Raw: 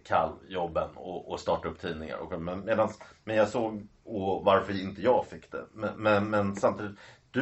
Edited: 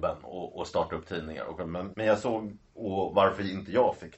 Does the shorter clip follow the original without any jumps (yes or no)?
no